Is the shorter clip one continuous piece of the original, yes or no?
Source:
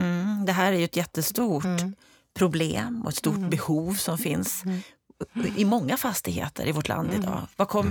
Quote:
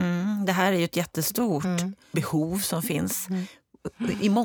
no